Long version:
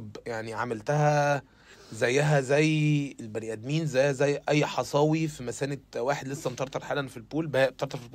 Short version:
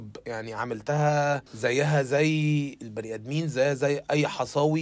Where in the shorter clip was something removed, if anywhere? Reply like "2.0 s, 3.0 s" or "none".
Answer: 1.5 s